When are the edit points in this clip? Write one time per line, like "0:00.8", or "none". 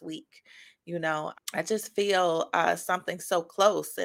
0:01.3